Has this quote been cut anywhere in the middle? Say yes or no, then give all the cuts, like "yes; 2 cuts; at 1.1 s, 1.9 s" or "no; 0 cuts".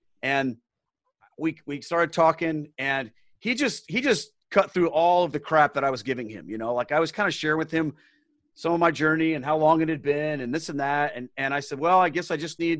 no; 0 cuts